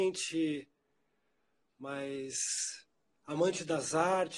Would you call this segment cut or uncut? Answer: uncut